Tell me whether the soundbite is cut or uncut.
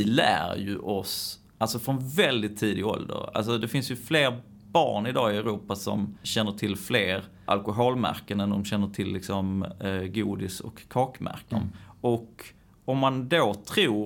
cut